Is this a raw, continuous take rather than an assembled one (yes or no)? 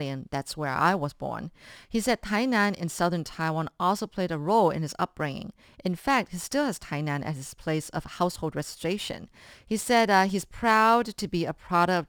no